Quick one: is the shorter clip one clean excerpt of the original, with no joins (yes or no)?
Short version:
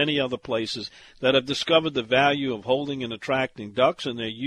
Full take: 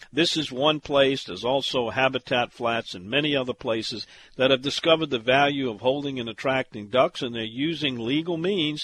yes